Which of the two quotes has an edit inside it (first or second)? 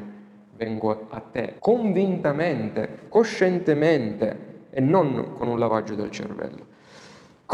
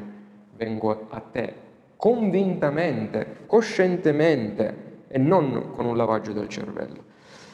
first